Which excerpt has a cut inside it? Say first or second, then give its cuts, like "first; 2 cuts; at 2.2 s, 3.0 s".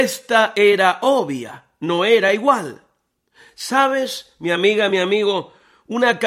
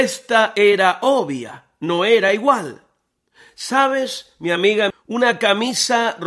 second; 1 cut; at 4.9 s